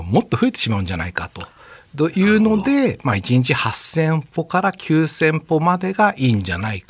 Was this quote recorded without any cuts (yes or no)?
yes